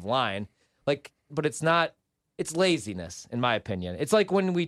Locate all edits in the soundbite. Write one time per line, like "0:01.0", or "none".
0:01.3